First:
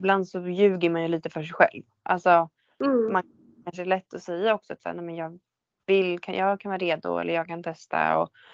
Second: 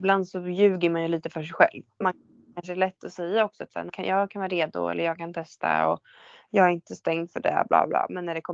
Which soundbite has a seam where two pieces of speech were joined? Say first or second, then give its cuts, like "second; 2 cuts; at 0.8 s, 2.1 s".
second; 2 cuts; at 2.0 s, 3.9 s